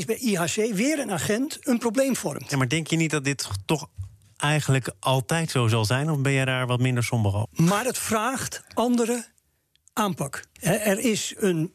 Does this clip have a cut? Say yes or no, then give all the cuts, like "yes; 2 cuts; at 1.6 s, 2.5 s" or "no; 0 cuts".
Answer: yes; 2 cuts; at 7.4 s, 10.6 s